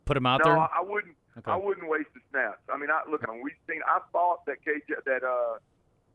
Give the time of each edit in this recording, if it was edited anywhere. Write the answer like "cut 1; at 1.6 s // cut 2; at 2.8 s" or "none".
cut 1; at 3.2 s // cut 2; at 5.0 s